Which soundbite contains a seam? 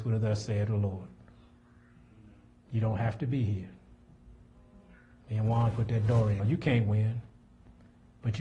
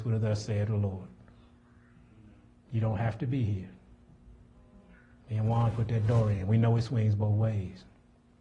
first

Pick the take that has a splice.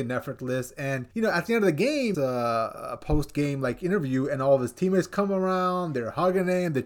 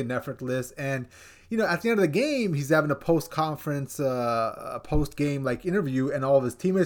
first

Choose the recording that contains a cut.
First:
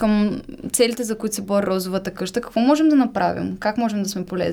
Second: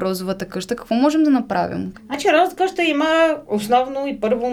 second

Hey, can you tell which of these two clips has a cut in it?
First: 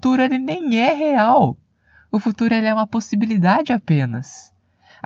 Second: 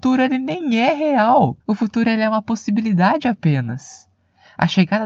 second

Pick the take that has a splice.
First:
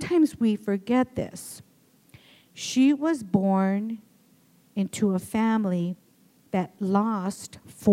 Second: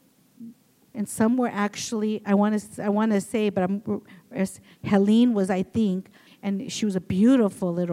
second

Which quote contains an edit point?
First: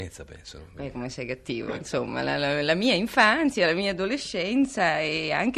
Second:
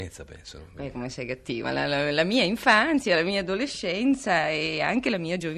second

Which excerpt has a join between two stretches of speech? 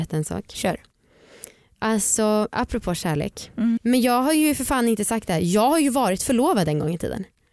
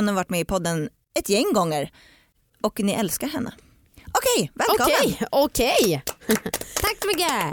first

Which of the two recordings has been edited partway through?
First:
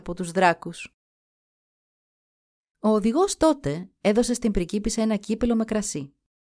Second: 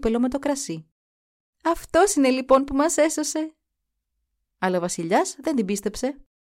second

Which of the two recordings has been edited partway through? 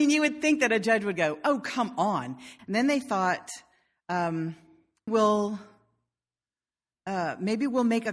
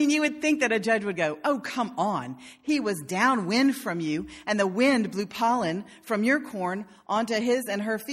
first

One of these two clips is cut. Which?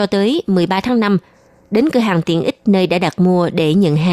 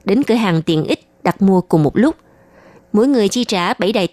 second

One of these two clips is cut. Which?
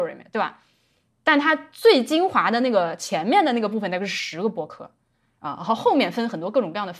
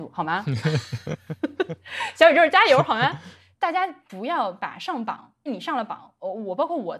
second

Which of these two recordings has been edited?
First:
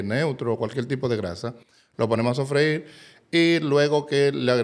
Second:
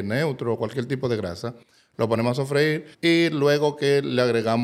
second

